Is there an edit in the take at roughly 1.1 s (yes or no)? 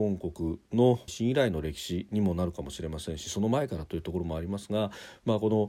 yes